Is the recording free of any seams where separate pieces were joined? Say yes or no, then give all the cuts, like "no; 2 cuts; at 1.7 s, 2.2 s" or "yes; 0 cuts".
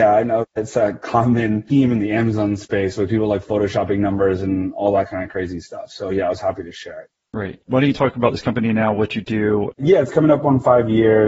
no; 1 cut; at 9.7 s